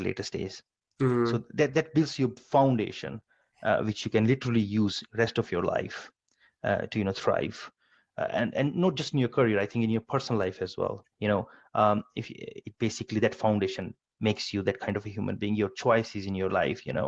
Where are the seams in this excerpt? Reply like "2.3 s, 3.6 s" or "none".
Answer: 11.1 s, 12.6 s